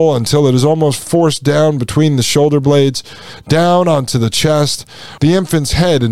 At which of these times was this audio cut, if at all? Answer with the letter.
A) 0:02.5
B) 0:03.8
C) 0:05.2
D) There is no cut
C